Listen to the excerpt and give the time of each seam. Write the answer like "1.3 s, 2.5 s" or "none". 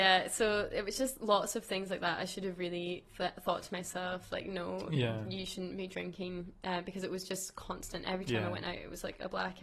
none